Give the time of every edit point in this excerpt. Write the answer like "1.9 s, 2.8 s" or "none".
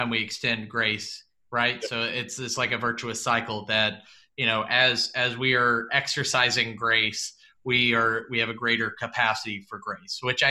1.4 s